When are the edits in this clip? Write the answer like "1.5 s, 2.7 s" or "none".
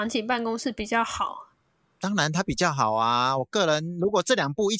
none